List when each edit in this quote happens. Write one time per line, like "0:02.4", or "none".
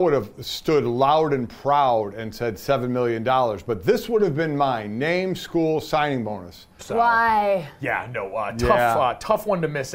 0:06.8